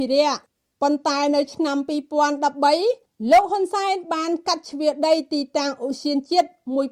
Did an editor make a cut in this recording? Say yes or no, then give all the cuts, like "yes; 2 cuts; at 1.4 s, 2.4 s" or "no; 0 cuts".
no; 0 cuts